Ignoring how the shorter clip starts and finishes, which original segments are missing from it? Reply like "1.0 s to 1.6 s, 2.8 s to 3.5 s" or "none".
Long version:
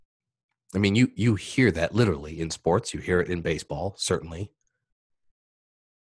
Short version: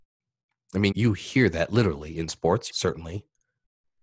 0.9 s to 1.1 s, 2.9 s to 4.0 s